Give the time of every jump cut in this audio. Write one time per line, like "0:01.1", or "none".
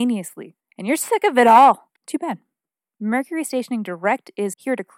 0:02.0